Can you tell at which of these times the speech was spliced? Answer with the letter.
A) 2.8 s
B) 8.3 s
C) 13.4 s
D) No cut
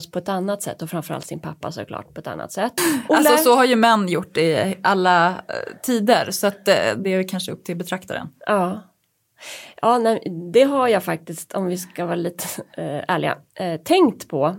A